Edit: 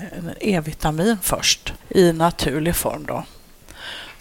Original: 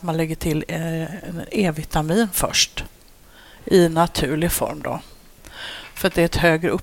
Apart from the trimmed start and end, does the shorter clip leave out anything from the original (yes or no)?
yes